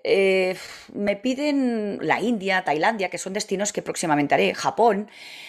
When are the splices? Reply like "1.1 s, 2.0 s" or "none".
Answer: 2.0 s